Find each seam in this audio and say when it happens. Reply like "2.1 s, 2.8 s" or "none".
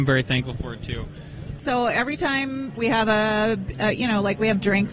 1.6 s, 2.8 s